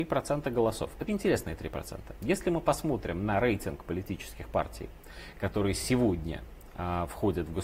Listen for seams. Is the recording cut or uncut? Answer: cut